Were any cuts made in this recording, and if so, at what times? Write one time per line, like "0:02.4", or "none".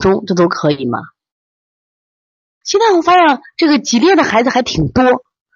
0:02.6